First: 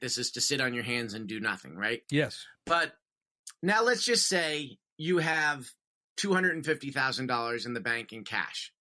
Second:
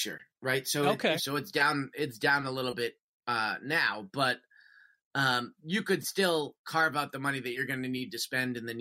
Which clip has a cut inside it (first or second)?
second